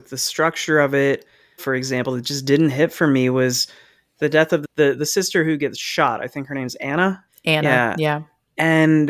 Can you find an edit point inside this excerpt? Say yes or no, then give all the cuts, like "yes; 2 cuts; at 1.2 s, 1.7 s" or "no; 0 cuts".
yes; 2 cuts; at 1.6 s, 7.3 s